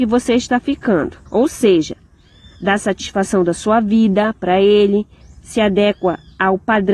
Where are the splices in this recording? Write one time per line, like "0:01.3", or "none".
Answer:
0:01.3
0:05.2